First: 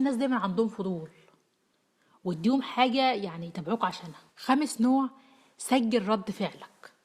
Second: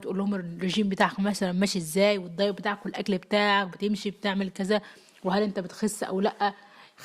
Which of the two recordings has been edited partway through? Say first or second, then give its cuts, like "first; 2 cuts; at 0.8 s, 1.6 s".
first; 1 cut; at 4.3 s